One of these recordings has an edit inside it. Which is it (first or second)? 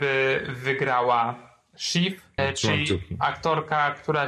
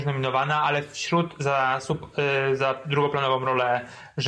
first